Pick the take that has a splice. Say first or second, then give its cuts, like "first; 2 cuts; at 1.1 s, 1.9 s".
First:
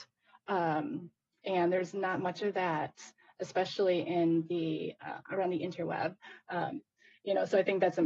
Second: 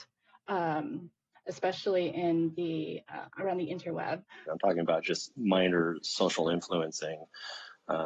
second; 2 cuts; at 1.3 s, 4.5 s